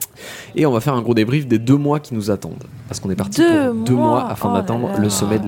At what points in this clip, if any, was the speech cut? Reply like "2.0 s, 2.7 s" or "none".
none